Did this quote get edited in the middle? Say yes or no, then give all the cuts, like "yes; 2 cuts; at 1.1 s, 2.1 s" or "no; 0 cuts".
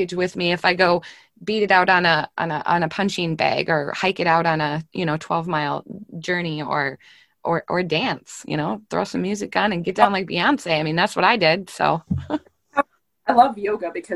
no; 0 cuts